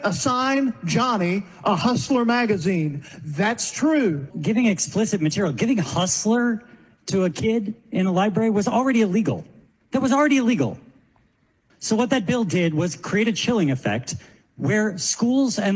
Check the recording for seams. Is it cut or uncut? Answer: cut